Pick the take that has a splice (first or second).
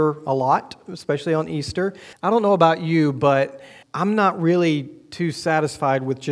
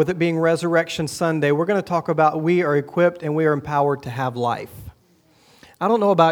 first